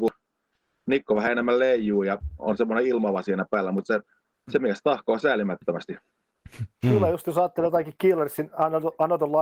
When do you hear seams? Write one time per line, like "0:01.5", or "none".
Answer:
none